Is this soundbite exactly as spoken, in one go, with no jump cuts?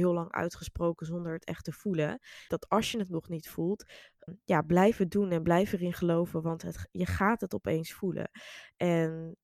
no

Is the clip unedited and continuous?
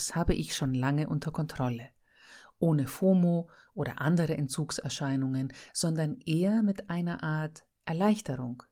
yes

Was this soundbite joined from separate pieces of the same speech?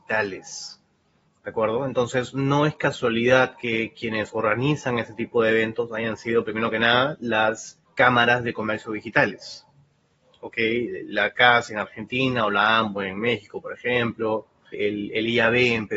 yes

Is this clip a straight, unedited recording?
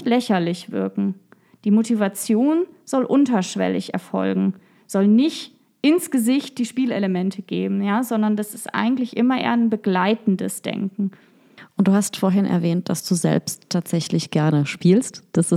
yes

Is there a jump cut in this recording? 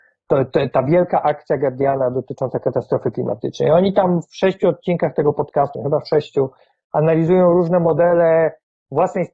yes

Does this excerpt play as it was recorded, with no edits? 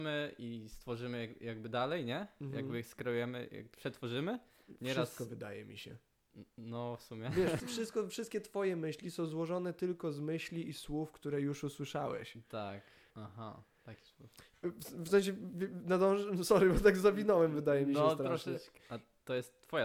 no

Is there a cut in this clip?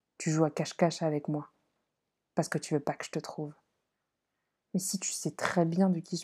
yes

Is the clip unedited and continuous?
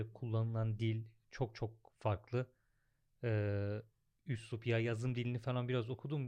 yes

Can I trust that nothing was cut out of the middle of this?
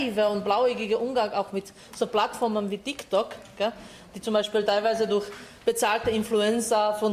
yes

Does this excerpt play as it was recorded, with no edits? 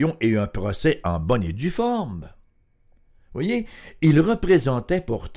yes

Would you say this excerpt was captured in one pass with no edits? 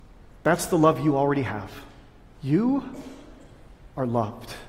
no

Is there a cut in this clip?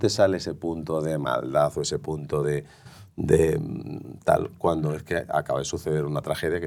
no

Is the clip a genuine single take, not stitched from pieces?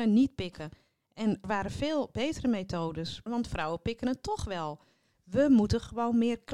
no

